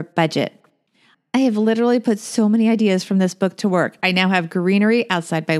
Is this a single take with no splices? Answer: yes; 0 cuts

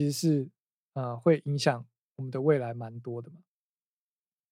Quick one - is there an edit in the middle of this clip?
no; 0 cuts

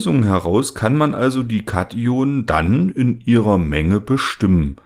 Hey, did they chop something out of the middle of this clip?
no; 0 cuts

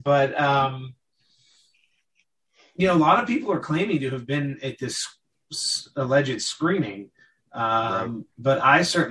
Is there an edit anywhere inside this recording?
no; 0 cuts

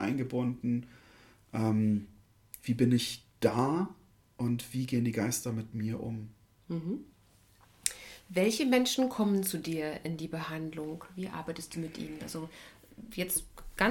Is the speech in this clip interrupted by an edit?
no; 0 cuts

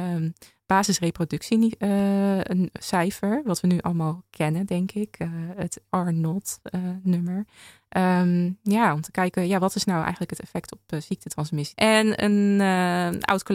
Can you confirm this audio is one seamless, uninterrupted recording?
no; 2 cuts; at 5.9 s, 11.7 s

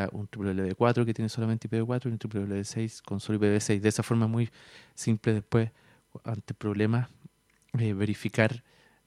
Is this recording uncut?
yes; 0 cuts

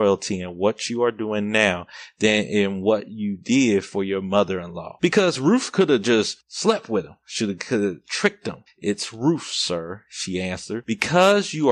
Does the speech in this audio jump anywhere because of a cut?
yes; 1 cut; at 8.7 s

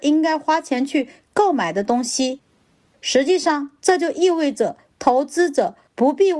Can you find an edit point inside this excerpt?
no; 0 cuts

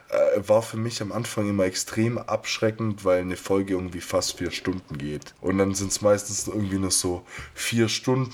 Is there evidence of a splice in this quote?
yes; 1 cut; at 5.4 s

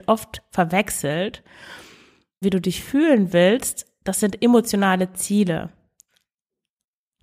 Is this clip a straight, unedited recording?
no; 1 cut; at 2.4 s

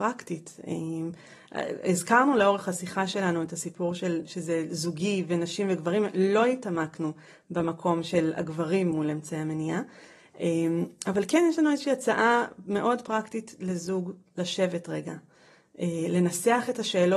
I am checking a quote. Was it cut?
no; 0 cuts

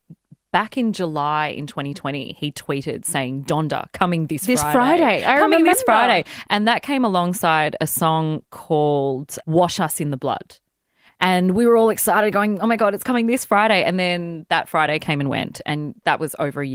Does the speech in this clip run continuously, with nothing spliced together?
yes; 0 cuts

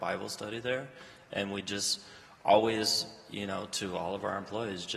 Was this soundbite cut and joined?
no; 0 cuts

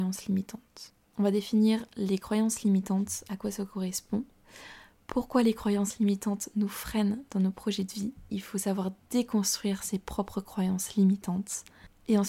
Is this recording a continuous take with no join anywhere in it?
no; 2 cuts; at 1.0 s, 8.3 s

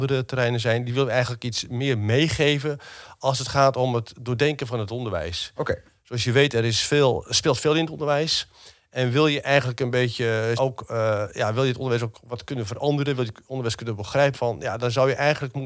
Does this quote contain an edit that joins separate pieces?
yes; 2 cuts; at 10.6 s, 14.3 s

